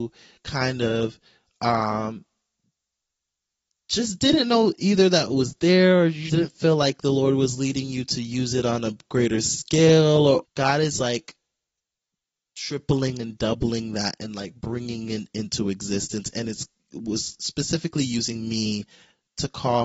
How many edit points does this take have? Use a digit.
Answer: 2